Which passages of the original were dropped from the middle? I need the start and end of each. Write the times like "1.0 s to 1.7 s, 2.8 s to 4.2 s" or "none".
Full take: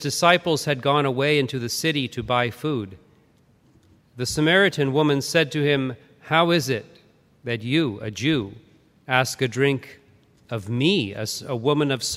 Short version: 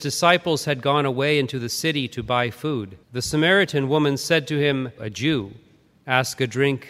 3.0 s to 4.1 s, 6.0 s to 8.0 s